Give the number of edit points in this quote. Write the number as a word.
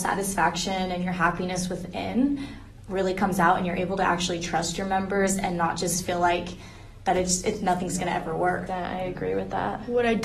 one